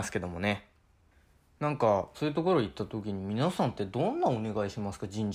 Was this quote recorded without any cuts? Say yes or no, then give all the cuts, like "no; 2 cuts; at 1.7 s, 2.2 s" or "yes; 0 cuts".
no; 1 cut; at 2.1 s